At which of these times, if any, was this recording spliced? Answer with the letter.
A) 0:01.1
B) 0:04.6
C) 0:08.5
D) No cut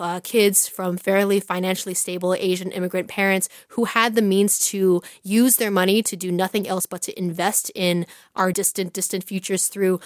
C